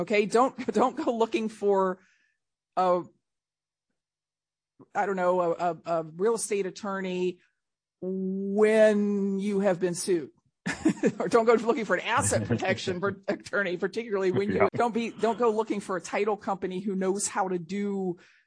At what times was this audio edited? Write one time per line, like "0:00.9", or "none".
0:14.7